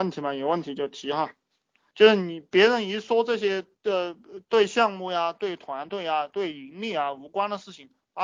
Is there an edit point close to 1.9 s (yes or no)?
yes